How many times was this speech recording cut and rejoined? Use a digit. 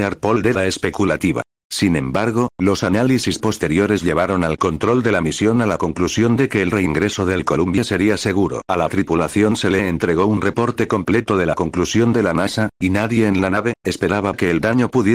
3